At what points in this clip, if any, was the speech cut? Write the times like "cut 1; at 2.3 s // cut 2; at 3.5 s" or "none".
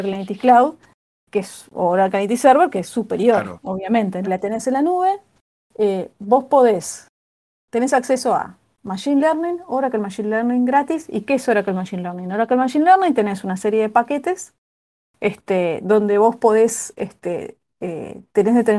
cut 1; at 4.3 s